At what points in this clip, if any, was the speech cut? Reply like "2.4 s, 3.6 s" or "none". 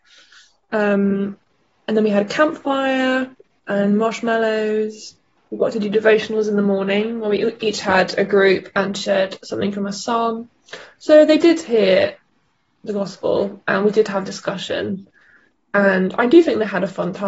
none